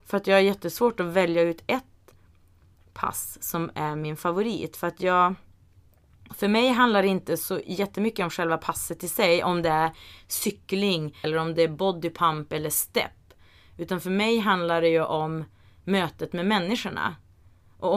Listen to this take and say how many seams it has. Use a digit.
1